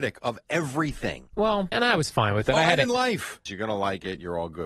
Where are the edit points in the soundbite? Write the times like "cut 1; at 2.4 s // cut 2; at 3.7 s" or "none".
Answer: cut 1; at 1.7 s // cut 2; at 3.5 s